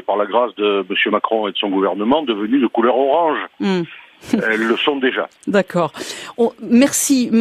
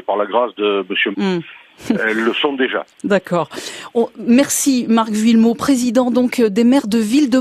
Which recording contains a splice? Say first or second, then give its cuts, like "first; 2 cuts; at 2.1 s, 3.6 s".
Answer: second; 1 cut; at 1.1 s